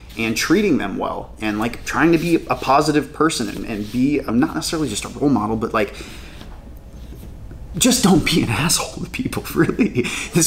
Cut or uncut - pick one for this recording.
cut